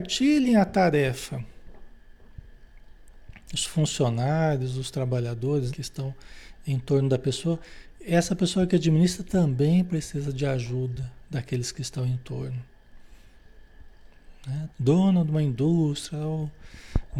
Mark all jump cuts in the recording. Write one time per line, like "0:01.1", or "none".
0:05.7
0:14.7